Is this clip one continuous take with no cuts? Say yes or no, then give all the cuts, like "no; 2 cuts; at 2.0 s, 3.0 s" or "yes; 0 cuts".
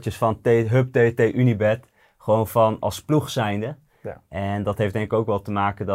yes; 0 cuts